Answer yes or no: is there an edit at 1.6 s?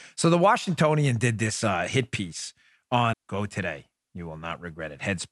no